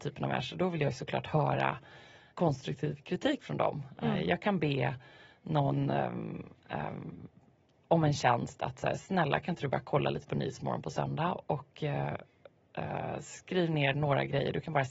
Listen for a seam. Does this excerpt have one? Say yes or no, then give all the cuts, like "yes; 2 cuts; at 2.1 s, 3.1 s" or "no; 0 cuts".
yes; 1 cut; at 2.3 s